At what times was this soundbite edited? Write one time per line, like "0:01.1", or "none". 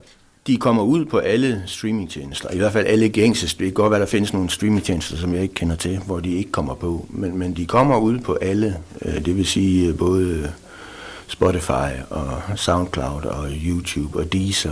none